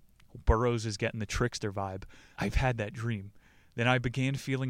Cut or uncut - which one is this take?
cut